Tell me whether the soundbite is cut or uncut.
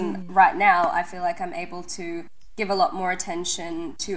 uncut